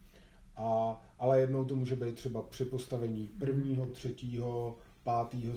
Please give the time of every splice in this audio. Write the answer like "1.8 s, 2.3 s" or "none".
none